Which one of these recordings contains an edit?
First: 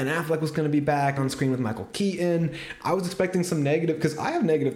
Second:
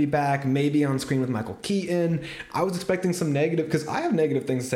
first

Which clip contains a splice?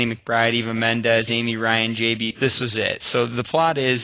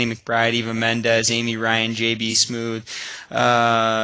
first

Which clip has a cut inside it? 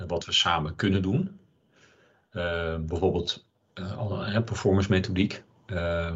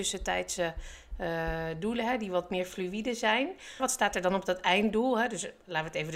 second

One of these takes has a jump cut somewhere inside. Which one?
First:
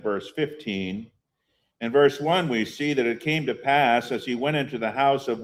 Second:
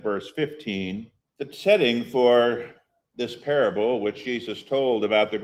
second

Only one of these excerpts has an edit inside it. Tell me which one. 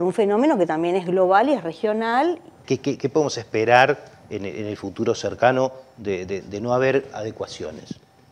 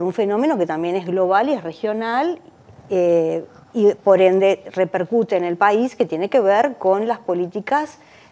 first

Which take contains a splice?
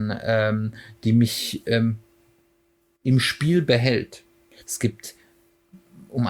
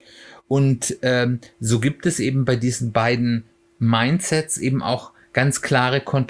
first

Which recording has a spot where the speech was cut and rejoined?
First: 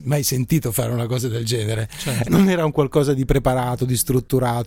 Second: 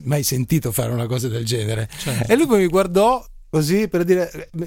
first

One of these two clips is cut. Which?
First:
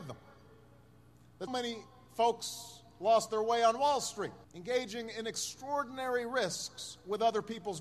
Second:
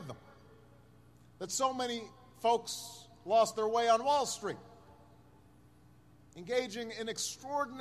first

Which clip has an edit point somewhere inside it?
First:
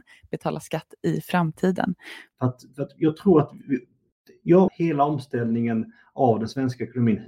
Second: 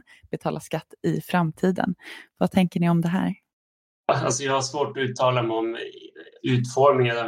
first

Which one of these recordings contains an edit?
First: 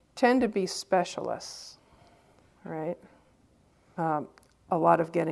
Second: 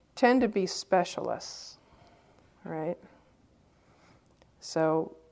first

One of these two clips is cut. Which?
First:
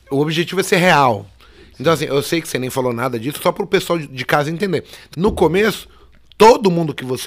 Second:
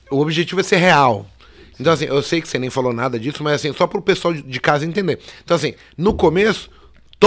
first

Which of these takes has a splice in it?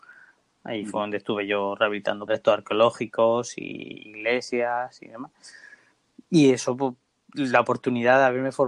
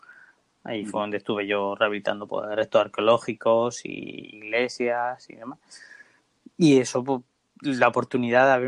first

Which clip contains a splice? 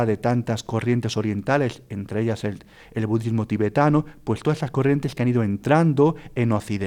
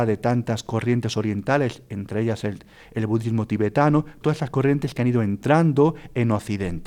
second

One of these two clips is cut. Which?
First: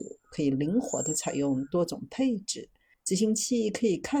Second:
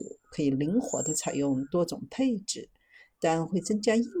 first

